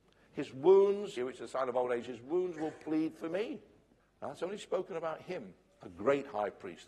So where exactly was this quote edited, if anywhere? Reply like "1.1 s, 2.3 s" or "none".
1.2 s, 4.0 s

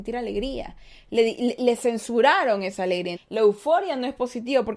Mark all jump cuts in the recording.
1.6 s, 3.1 s

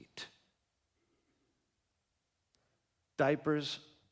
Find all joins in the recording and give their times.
none

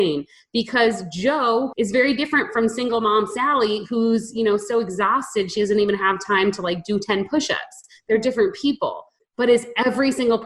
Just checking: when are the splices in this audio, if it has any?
1.7 s, 9.2 s

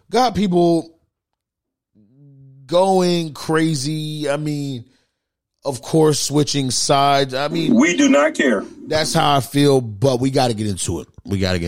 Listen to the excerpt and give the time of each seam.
none

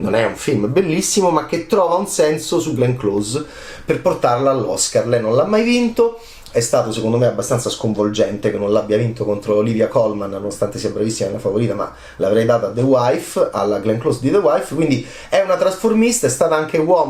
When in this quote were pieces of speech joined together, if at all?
none

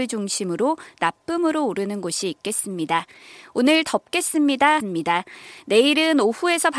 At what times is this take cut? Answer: 4.8 s

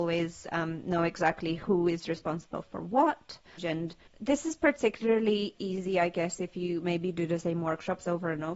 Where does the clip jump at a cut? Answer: 3.6 s

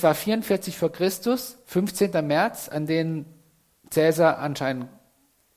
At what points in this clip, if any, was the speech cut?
none

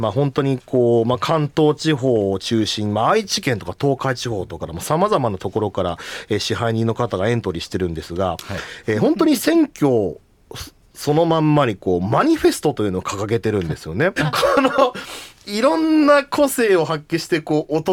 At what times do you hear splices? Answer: 4.6 s, 14.2 s

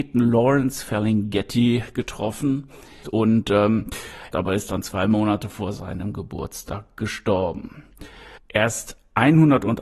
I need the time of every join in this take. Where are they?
3.0 s, 4.3 s, 8.4 s

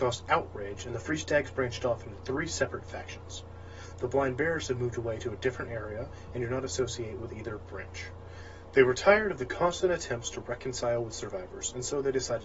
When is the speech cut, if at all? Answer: 3.9 s

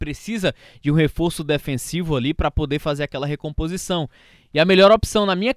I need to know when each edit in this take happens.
none

